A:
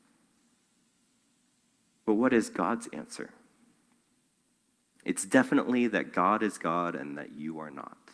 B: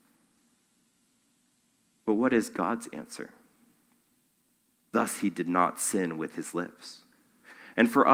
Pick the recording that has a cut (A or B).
B